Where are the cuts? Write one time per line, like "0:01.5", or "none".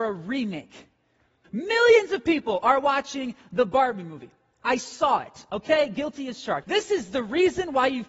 0:01.4
0:06.6